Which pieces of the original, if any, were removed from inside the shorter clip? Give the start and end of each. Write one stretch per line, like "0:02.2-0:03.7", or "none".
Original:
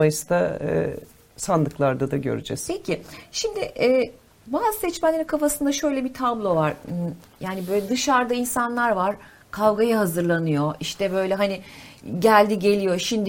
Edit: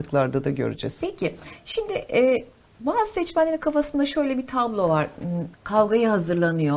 0:07.2-0:09.4